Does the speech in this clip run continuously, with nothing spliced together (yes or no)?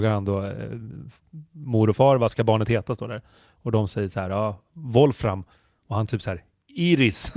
yes